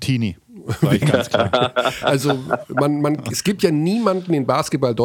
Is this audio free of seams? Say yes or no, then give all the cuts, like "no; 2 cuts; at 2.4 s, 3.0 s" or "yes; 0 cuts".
yes; 0 cuts